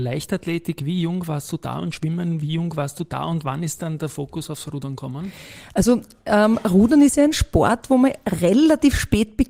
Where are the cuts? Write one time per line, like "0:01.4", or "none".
none